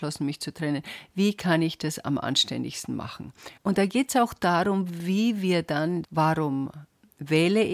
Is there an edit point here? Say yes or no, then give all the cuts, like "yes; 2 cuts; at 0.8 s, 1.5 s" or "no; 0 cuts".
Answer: yes; 2 cuts; at 3.6 s, 6.0 s